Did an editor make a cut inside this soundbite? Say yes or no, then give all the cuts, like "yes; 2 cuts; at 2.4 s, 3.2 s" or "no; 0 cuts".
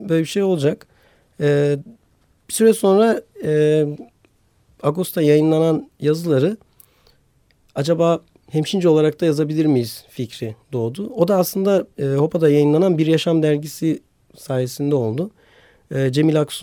no; 0 cuts